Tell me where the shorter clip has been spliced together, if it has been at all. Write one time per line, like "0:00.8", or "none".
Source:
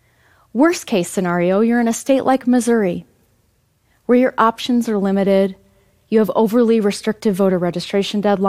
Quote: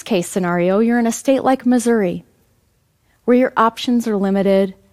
none